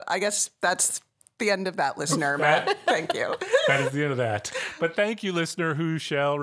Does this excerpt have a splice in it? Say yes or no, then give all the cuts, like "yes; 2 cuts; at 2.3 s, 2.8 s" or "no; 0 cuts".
no; 0 cuts